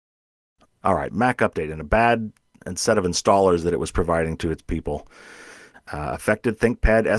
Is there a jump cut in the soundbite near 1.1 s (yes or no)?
yes